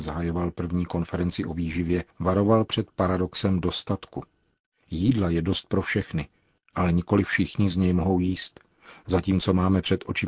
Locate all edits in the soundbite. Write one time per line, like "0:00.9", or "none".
0:02.1